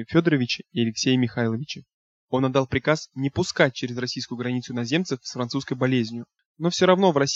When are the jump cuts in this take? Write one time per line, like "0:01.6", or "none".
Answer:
0:02.3

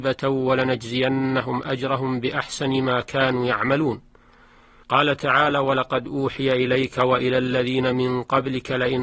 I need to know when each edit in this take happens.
0:04.8

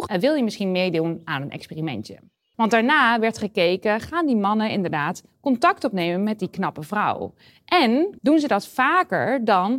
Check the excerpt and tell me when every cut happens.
0:02.5
0:08.2

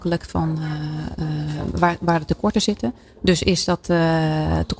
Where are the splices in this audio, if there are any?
none

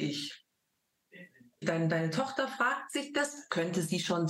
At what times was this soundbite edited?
0:01.6

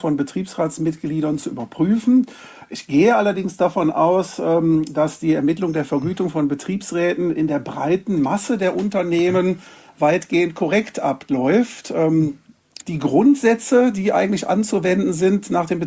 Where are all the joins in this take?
0:12.8

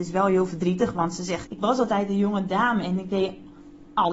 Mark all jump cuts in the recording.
0:01.5

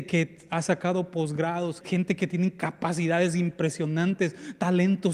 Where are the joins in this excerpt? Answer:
0:01.8

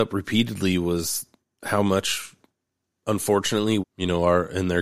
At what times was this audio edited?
0:03.8

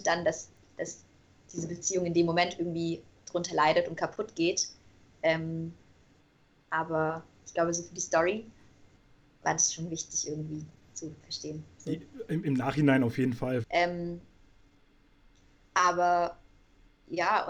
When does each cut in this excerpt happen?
0:13.6

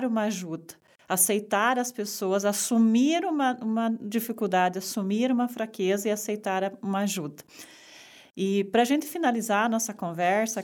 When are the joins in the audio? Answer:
none

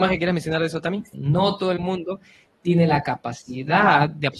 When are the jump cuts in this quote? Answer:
0:01.1

